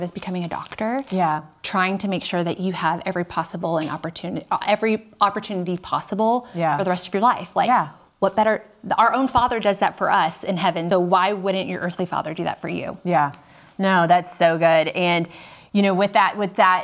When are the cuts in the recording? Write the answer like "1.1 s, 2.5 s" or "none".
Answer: 10.9 s